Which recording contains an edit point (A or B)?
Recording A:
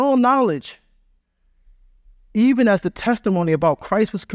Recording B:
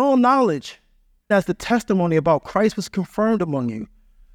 B